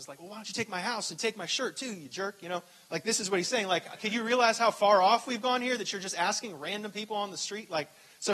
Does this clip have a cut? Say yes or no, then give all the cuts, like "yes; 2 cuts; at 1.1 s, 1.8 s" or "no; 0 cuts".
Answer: no; 0 cuts